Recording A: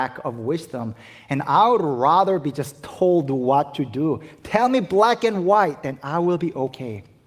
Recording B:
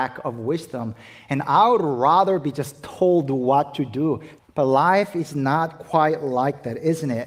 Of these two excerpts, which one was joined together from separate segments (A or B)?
B